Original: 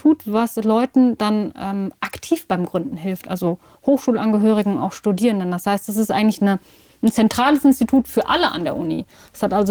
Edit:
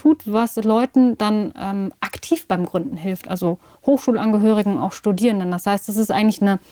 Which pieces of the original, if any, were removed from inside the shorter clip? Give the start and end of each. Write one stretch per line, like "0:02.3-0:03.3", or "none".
none